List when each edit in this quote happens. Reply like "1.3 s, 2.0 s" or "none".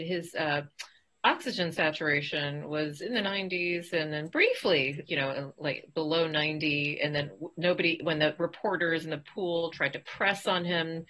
5.1 s